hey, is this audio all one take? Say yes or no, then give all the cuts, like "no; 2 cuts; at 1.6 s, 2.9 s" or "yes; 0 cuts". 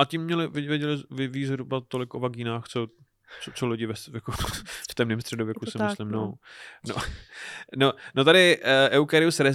yes; 0 cuts